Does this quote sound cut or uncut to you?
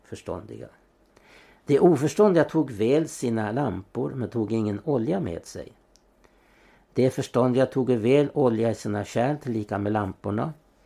uncut